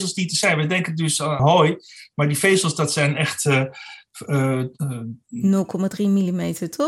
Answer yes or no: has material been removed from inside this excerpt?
yes